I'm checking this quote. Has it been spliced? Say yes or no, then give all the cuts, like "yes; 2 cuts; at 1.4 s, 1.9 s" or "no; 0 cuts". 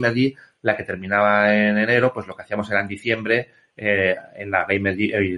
no; 0 cuts